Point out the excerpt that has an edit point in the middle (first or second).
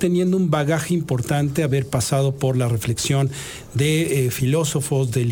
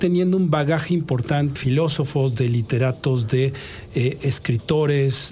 second